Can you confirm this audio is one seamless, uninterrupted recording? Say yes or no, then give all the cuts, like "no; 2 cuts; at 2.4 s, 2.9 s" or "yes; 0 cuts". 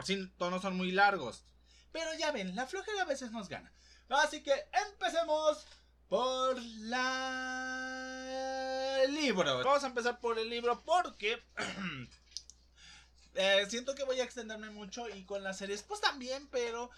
no; 1 cut; at 9.6 s